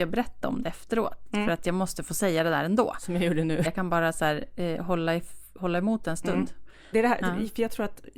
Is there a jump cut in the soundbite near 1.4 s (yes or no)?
no